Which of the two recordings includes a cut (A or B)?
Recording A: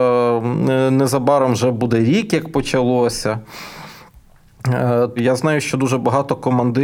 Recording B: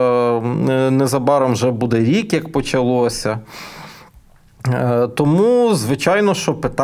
A